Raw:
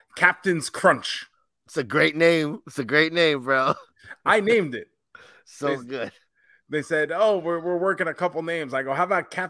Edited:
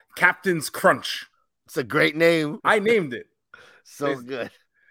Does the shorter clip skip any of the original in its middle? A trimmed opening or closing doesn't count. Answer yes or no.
yes